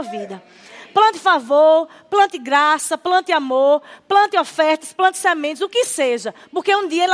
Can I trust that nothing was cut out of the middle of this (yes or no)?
yes